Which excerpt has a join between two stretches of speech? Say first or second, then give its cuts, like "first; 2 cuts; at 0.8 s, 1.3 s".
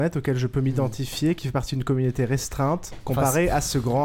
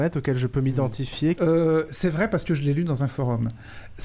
second; 1 cut; at 1.4 s